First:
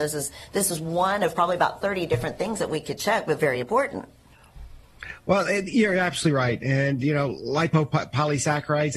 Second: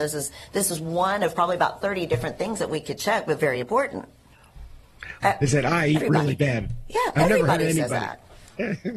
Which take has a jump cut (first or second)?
second